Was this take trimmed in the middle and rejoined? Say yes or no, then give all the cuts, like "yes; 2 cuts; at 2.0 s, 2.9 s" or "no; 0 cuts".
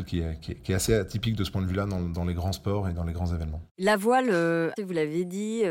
yes; 1 cut; at 4.8 s